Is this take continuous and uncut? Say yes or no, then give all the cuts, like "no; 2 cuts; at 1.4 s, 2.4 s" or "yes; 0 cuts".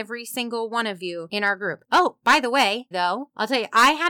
no; 2 cuts; at 1.8 s, 2.9 s